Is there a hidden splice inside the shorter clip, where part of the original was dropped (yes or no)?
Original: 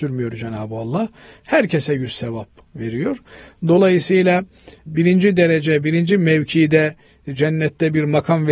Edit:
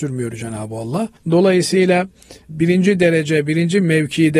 yes